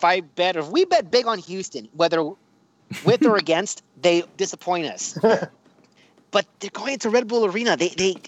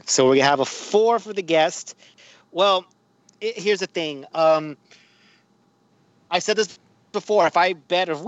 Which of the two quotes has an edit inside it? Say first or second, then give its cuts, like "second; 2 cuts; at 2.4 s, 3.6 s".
first; 2 cuts; at 4.4 s, 6.5 s